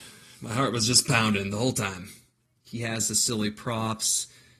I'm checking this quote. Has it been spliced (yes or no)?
yes